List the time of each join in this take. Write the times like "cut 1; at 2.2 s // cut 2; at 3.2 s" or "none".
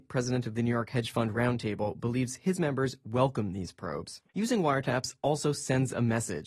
cut 1; at 4.3 s